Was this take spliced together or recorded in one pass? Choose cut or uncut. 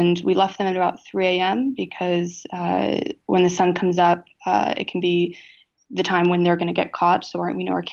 uncut